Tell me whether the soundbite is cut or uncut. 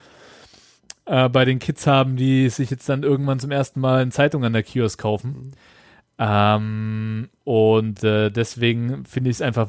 uncut